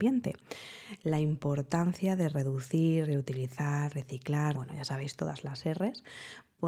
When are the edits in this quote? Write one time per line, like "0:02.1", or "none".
0:04.5